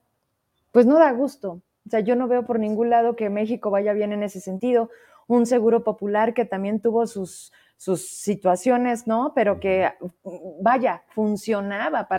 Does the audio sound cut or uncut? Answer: uncut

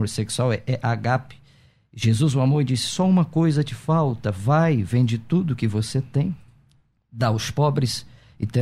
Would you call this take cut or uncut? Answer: uncut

